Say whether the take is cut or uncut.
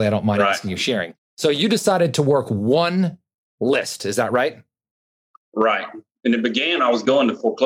uncut